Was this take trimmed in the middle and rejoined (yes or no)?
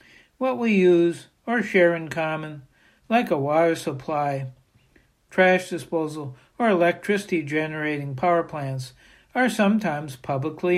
no